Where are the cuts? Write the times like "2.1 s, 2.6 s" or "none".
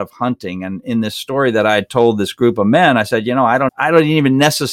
3.7 s